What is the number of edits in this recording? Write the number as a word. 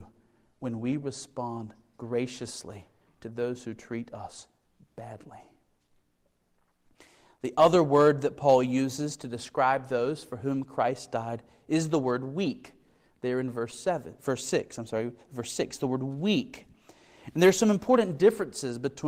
zero